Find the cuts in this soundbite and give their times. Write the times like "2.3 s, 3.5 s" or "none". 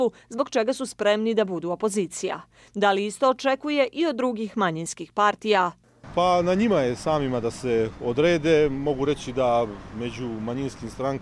none